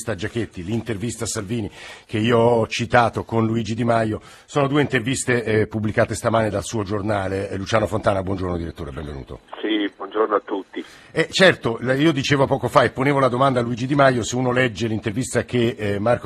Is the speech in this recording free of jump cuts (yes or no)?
yes